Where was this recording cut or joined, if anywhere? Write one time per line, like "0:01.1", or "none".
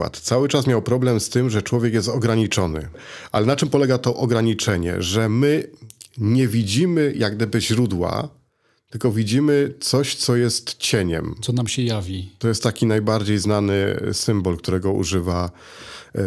none